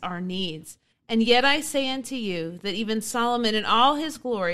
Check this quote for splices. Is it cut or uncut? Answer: cut